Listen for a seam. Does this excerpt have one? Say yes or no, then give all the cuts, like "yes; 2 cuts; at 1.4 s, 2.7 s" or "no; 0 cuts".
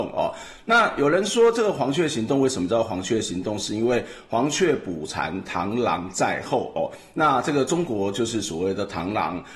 no; 0 cuts